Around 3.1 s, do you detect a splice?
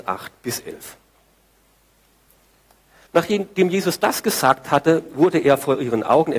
yes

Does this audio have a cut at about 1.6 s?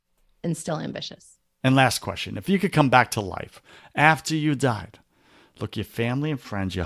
yes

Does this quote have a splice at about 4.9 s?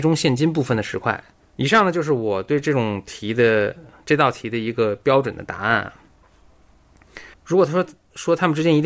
no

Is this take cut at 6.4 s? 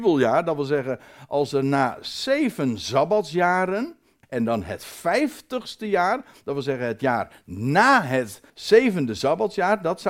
no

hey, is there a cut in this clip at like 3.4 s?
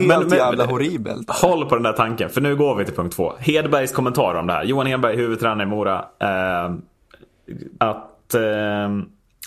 no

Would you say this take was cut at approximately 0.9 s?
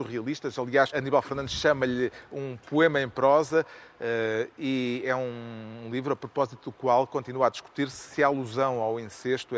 yes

